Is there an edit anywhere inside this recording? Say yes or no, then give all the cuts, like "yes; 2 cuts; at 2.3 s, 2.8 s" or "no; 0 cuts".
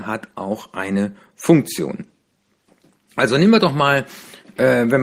no; 0 cuts